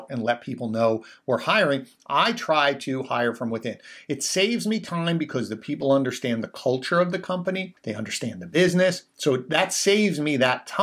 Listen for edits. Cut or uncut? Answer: cut